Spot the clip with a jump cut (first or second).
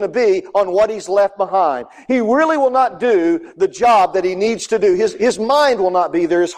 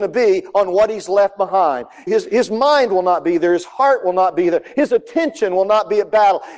second